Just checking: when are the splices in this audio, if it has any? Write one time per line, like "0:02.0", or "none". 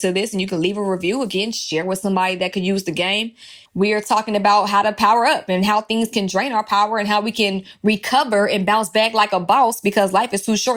0:03.7

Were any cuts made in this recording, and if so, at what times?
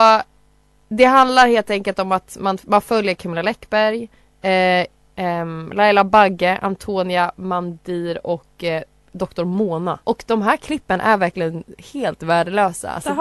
0:05.1
0:10.0

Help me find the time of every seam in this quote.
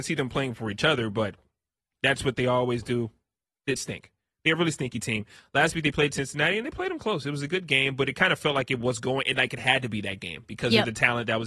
0:03.8

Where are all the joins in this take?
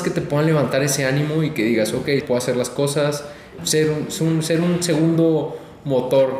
0:02.2
0:03.6

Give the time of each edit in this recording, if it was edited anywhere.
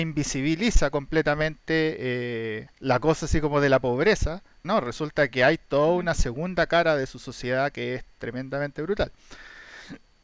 0:02.7
0:04.6

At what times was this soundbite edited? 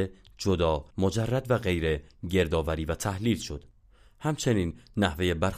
0:00.9

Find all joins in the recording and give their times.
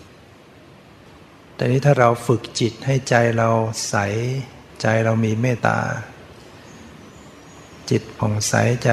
0:05.6

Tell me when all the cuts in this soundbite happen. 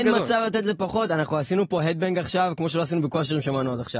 none

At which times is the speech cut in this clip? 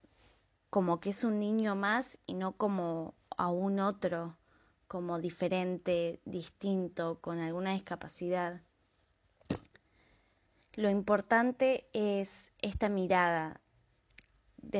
none

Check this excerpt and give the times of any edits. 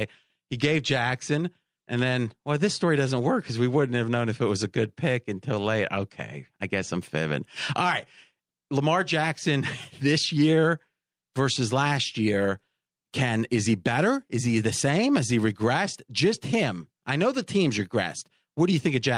none

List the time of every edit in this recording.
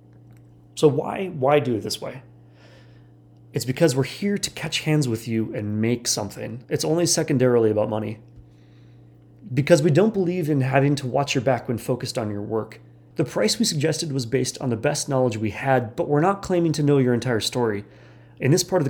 0:06.6
0:13.1

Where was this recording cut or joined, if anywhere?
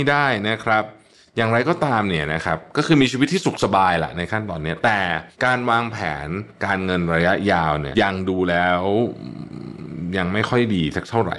0:05.3
0:07.9

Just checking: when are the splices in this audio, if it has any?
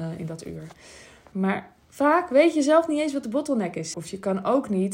0:01.3
0:03.9

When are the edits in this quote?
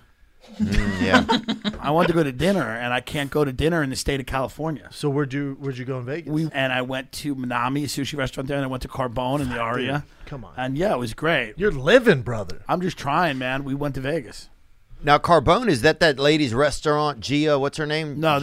0:06.5

